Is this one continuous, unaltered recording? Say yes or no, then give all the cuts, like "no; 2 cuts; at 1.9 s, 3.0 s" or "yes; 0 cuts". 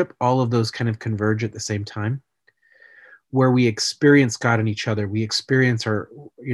yes; 0 cuts